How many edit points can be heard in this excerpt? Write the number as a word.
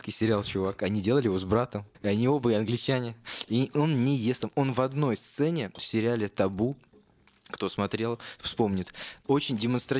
one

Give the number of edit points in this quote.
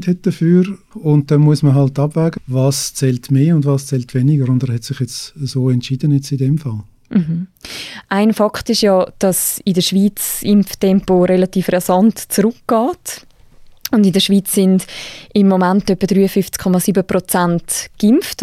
two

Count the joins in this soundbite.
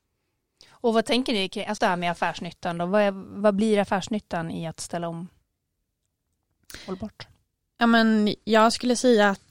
one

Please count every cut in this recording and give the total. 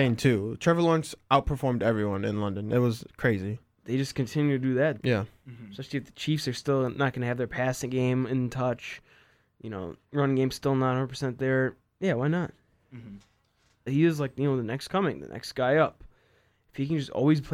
three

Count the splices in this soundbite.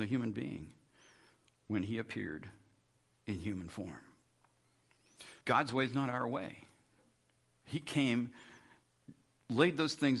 one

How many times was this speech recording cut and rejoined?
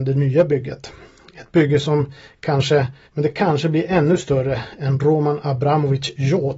one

